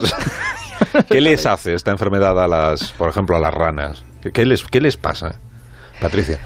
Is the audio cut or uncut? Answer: uncut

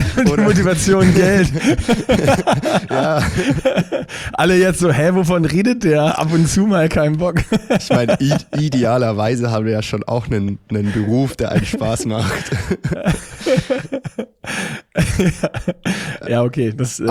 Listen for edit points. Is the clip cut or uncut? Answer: uncut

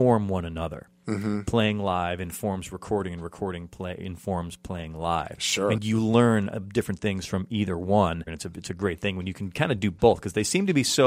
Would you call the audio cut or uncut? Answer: cut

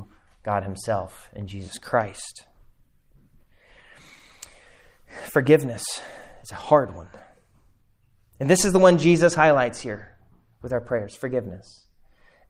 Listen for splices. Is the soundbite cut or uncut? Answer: uncut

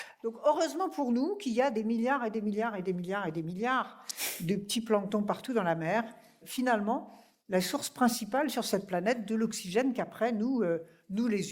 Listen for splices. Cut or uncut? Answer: cut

